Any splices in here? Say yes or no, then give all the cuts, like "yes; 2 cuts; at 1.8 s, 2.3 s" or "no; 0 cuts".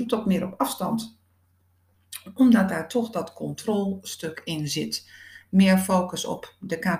no; 0 cuts